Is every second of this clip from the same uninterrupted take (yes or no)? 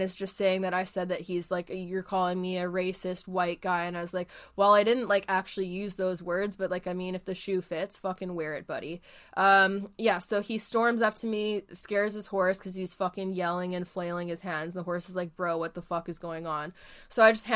yes